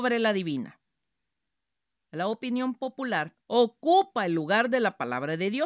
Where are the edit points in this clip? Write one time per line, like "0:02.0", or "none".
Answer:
0:02.0
0:03.4